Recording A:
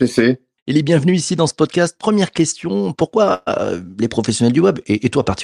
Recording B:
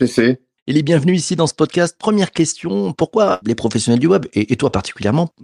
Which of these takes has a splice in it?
B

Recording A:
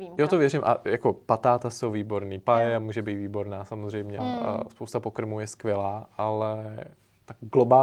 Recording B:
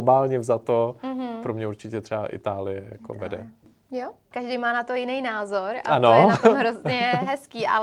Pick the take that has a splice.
A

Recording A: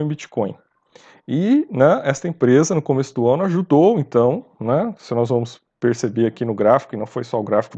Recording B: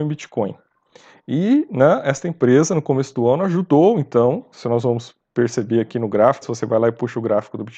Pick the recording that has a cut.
B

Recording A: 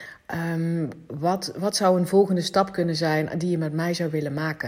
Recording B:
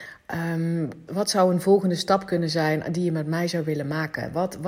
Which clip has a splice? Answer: B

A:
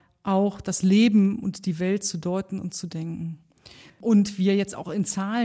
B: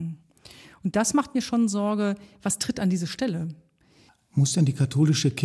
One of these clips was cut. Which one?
A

